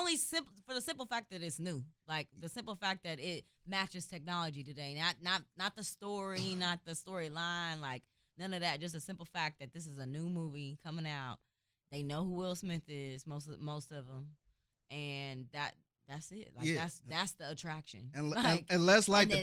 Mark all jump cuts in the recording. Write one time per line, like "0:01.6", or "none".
none